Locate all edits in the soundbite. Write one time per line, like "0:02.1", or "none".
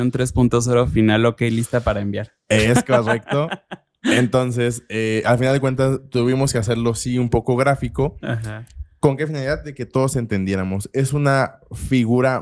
none

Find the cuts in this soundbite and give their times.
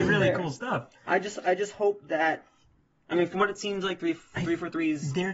none

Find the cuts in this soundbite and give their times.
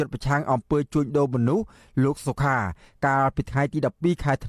0:02.2

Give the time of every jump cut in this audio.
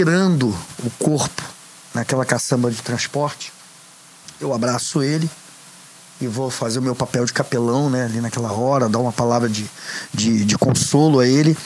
none

